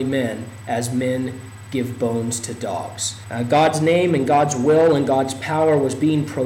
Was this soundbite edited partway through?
yes; 1 cut; at 3.2 s

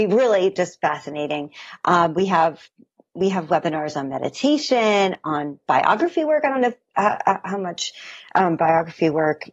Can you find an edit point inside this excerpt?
no; 0 cuts

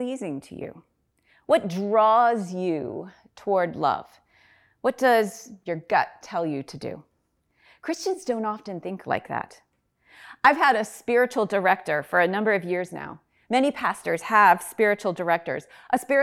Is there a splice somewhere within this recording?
no; 0 cuts

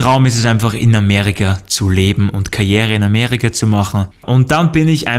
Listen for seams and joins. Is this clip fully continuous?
no; 1 cut; at 4.1 s

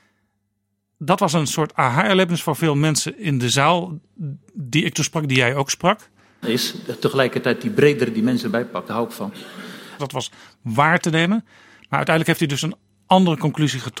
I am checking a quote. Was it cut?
yes; 2 cuts; at 6.4 s, 10.0 s

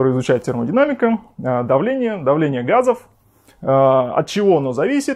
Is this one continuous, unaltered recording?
yes; 0 cuts

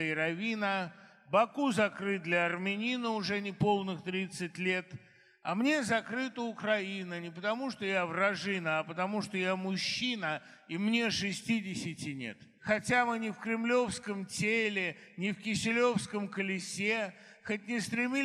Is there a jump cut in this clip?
yes; 1 cut; at 12.6 s

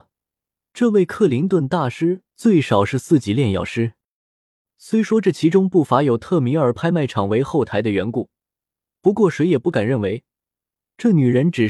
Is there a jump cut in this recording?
yes; 1 cut; at 4.7 s

